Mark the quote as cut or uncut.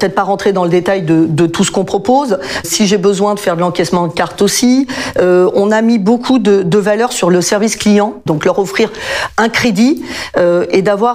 cut